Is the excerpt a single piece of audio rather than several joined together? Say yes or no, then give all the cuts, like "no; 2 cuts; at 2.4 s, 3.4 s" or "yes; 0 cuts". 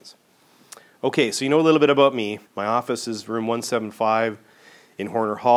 no; 1 cut; at 2.4 s